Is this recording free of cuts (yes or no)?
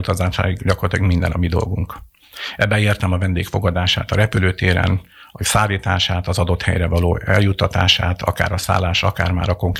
yes